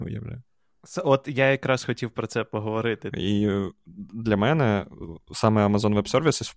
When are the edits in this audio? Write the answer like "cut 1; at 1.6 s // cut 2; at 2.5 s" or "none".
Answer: cut 1; at 3.1 s